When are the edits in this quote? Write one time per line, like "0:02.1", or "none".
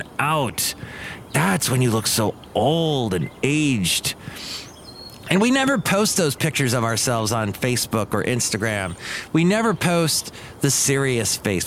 none